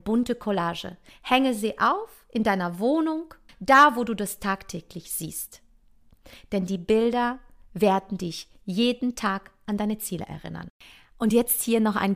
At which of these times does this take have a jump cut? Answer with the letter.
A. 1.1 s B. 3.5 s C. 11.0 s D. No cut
B